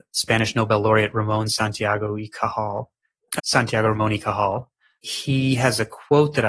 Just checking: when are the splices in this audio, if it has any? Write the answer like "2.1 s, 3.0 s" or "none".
3.4 s